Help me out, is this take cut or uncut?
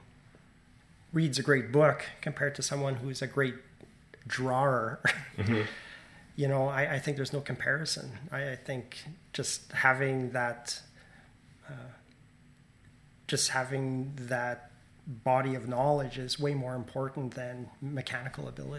uncut